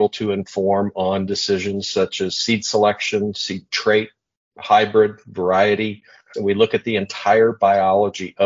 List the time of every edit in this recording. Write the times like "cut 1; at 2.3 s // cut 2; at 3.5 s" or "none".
cut 1; at 6.3 s